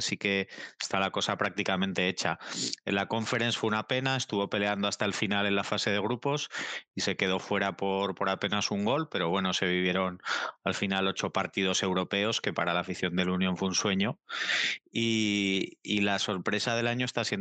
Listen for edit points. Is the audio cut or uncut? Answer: uncut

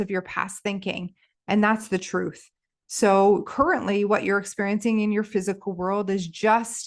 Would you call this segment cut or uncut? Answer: uncut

